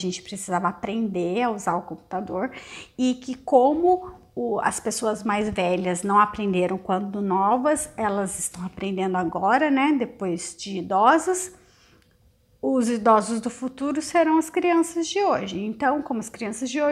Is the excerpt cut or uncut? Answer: uncut